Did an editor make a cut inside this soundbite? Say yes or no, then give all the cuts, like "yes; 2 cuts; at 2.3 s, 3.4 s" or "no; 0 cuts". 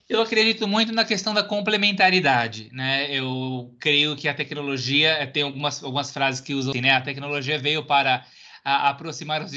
yes; 1 cut; at 6.7 s